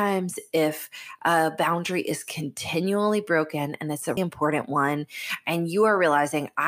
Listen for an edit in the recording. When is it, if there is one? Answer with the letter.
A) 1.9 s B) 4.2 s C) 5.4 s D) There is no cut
B